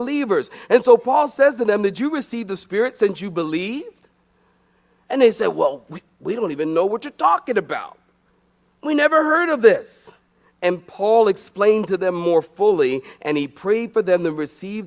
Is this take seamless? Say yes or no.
yes